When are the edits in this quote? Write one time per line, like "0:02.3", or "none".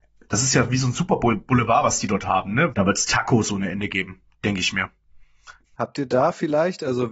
0:02.7
0:05.7

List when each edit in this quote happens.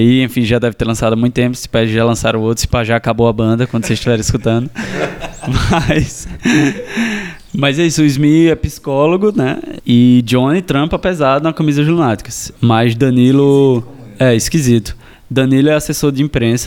0:09.8
0:12.6

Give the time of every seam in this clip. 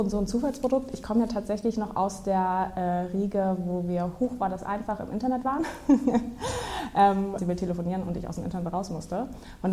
0:07.4

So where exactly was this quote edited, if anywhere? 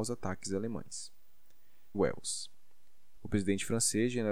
0:01.9
0:03.2

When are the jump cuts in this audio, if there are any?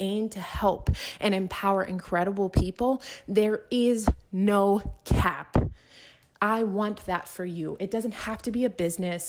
0:06.3

